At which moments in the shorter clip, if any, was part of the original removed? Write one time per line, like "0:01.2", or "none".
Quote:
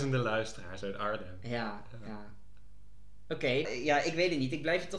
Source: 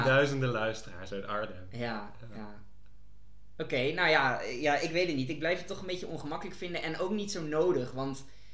0:03.6